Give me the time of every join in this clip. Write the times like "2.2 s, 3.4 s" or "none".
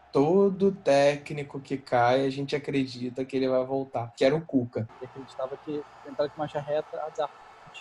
4.9 s